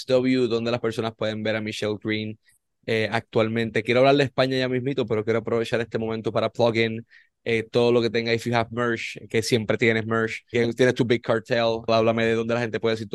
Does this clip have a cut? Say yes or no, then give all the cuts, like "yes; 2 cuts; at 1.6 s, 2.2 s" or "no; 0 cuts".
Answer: yes; 2 cuts; at 10.5 s, 11.9 s